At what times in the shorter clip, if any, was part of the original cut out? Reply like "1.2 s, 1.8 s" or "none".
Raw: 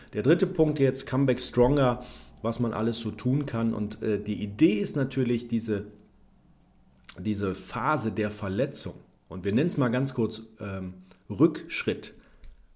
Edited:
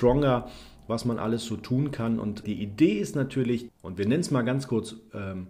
2.4 s, 3.7 s